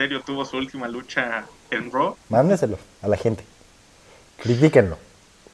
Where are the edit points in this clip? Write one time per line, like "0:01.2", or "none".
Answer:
0:02.3